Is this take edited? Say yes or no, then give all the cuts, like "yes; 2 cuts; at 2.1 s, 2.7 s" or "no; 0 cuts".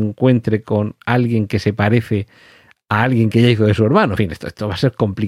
no; 0 cuts